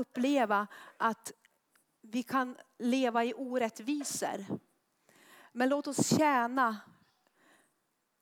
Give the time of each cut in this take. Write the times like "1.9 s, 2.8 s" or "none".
none